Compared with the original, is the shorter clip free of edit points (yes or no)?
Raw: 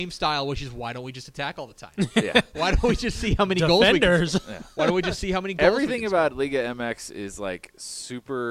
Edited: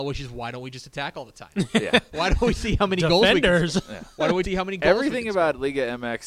no